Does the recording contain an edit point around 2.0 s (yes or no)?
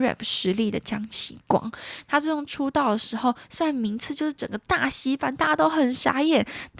yes